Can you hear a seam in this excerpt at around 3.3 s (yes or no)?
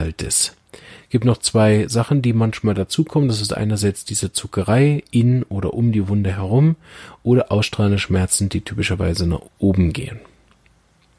no